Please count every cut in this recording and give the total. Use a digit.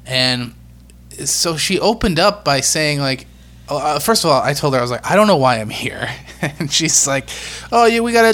0